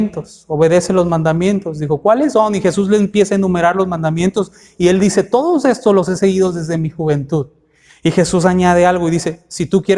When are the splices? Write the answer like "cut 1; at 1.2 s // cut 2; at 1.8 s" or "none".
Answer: none